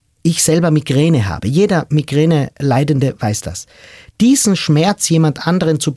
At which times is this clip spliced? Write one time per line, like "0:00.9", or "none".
none